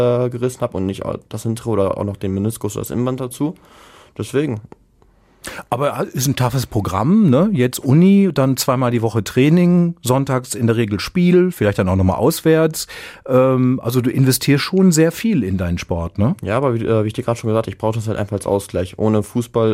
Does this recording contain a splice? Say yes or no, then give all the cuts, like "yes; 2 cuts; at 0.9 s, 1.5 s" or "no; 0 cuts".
no; 0 cuts